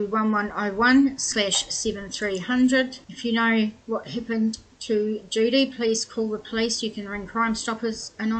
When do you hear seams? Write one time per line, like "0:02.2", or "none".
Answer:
0:03.0